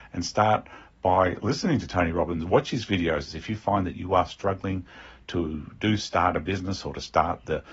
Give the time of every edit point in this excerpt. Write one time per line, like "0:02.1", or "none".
0:03.3

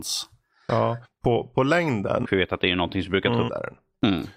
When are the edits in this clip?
0:01.0
0:02.2
0:03.5

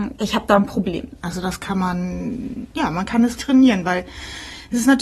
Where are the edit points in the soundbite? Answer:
0:01.1
0:03.4

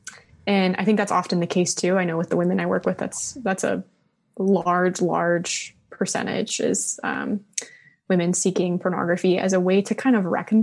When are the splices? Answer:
none

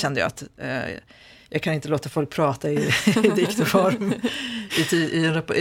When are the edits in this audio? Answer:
none

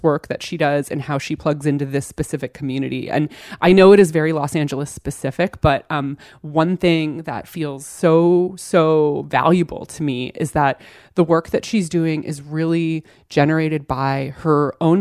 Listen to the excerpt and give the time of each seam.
none

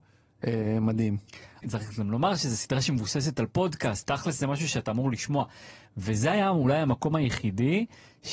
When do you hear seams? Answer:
0:01.6
0:04.0

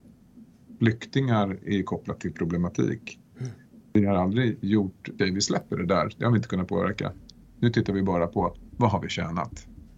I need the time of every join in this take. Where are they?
0:05.2

